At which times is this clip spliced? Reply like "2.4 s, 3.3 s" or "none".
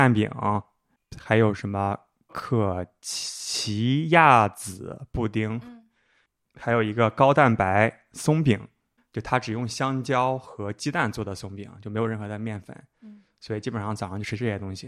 2.3 s